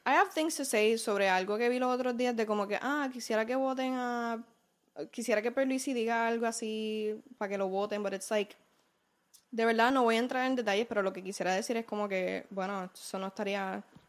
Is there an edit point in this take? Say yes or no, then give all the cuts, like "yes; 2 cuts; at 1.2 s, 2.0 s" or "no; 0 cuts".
no; 0 cuts